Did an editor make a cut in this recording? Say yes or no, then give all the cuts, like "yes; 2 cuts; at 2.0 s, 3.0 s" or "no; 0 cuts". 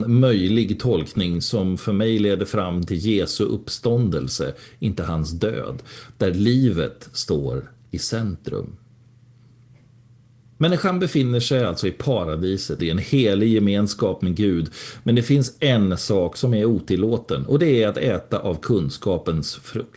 yes; 1 cut; at 12.8 s